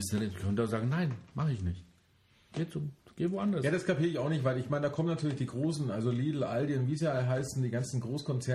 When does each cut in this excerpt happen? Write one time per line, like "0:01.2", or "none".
none

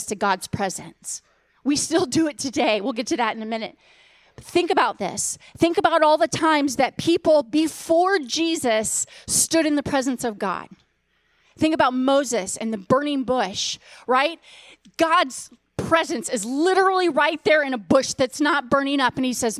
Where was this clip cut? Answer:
none

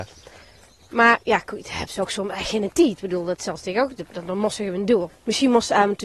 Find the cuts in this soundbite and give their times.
0:01.2
0:05.1

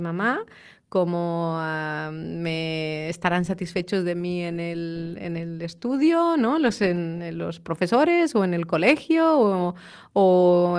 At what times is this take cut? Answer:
none

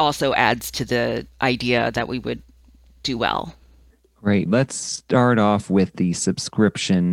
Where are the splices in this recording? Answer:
0:04.5

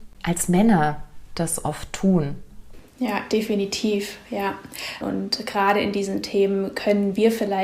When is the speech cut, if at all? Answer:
0:05.0

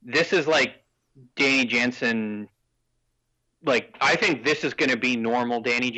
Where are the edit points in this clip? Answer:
none

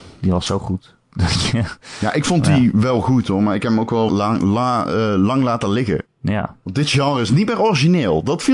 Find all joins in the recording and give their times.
0:04.1
0:06.0

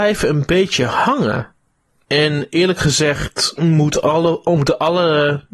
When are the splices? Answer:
0:02.0

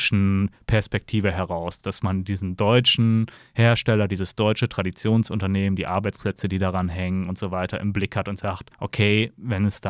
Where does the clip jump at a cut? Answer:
none

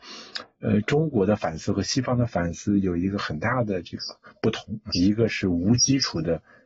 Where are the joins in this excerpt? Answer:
0:04.9

